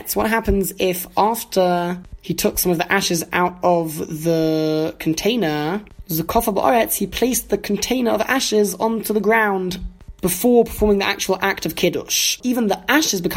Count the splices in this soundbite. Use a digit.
1